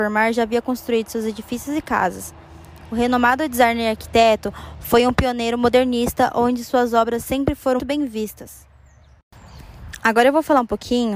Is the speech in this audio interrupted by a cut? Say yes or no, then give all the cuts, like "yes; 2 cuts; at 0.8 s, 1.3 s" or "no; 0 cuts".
yes; 1 cut; at 7.8 s